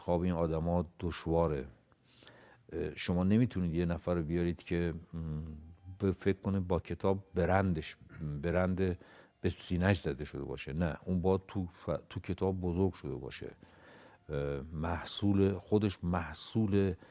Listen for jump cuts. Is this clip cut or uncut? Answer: cut